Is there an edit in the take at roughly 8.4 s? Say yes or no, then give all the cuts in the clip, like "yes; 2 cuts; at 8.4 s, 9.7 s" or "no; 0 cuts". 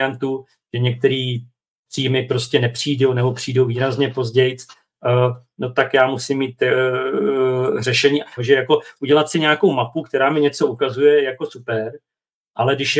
yes; 1 cut; at 8.4 s